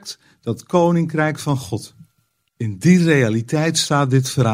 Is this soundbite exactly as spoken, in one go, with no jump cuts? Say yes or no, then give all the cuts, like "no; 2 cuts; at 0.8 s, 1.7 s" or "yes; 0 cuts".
no; 1 cut; at 2.5 s